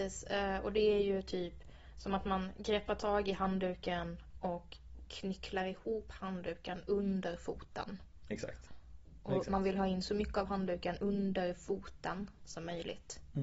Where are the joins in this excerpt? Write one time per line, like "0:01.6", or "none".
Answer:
0:08.7